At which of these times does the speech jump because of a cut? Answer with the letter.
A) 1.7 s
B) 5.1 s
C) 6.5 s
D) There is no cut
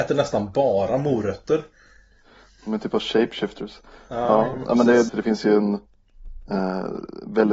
B